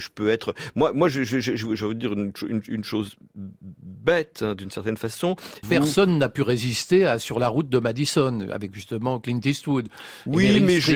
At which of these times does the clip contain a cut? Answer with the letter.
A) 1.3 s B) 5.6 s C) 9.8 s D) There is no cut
B